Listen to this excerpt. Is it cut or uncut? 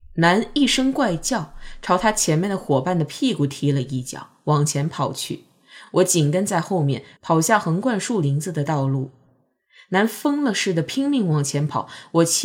uncut